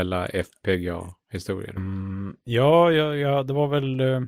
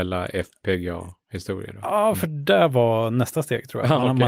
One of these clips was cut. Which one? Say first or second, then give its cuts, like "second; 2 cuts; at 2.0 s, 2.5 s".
first; 1 cut; at 1.8 s